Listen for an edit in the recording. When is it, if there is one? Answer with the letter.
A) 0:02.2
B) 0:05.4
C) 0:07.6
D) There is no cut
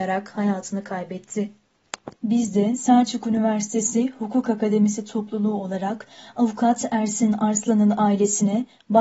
A